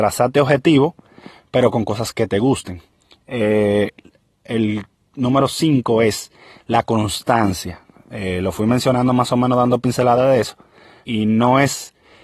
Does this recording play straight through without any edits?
no; 1 cut; at 11.0 s

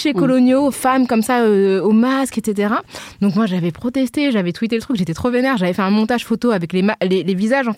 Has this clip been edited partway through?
no; 0 cuts

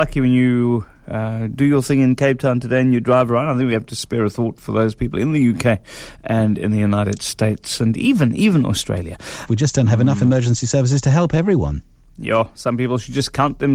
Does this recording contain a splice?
yes; 1 cut; at 9.5 s

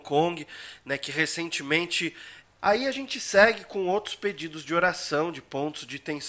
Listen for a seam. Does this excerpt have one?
yes; 1 cut; at 2.4 s

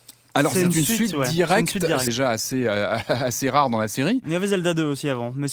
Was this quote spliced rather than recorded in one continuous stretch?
yes; 1 cut; at 2.1 s

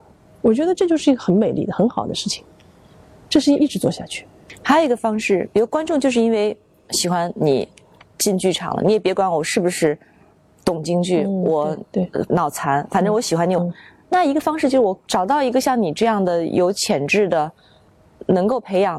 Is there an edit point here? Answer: yes; 2 cuts; at 12.3 s, 13.6 s

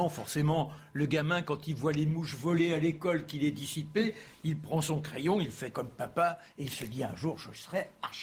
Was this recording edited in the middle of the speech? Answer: no; 0 cuts

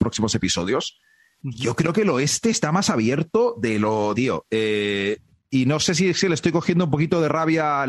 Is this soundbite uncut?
no; 1 cut; at 4.1 s

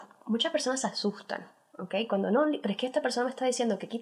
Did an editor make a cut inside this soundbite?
no; 0 cuts

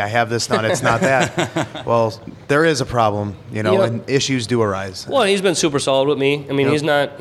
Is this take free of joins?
yes; 0 cuts

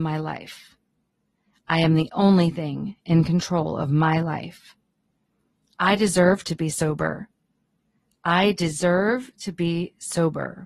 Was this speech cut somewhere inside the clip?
no; 0 cuts

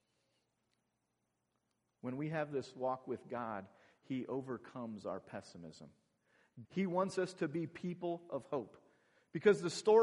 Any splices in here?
yes; 1 cut; at 6.6 s

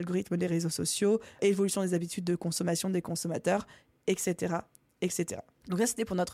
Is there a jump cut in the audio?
no; 0 cuts

